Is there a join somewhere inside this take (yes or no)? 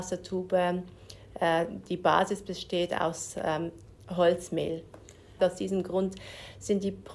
yes